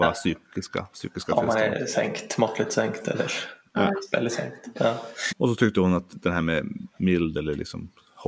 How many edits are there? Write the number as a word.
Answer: two